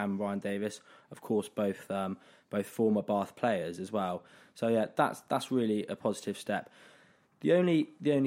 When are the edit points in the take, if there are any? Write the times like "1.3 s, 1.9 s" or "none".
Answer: none

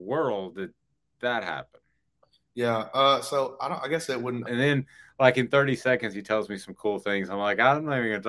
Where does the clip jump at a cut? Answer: 4.5 s

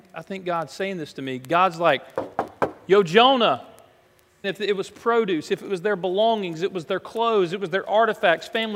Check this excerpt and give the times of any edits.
4.4 s

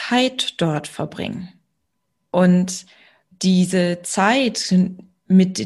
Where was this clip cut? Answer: none

